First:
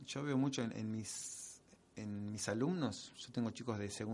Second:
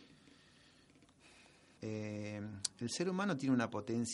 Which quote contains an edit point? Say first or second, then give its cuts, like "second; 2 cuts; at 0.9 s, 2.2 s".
second; 1 cut; at 1.8 s